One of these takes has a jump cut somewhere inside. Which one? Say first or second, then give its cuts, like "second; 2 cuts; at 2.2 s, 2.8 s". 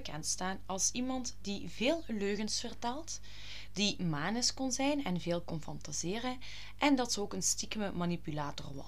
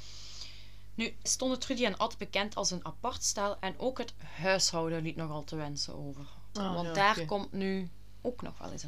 second; 2 cuts; at 1.3 s, 6.6 s